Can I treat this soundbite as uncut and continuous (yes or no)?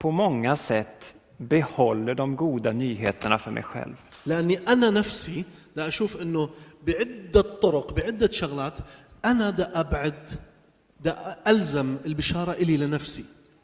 yes